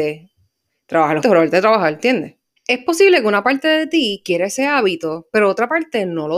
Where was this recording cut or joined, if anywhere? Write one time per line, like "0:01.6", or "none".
0:01.2
0:02.6